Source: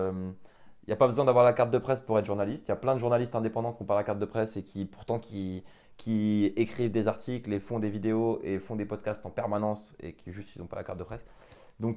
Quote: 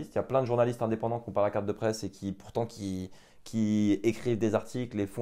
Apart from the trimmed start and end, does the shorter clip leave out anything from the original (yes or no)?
no